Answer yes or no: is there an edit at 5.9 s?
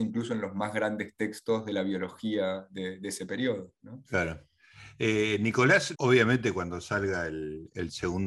yes